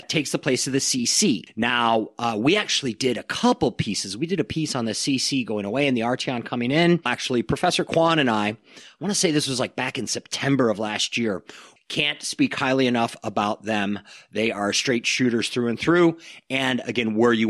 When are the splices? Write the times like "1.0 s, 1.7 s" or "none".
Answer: 7.1 s, 11.8 s